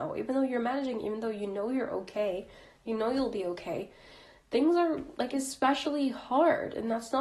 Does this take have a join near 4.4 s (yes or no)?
no